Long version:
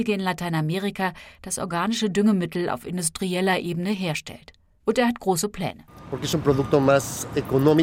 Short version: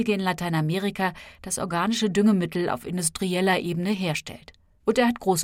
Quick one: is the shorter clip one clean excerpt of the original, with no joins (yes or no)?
yes